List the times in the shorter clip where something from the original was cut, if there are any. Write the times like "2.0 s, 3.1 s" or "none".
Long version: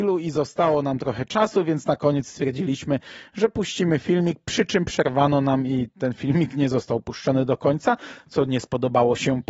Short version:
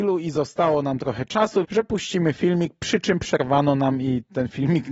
1.6 s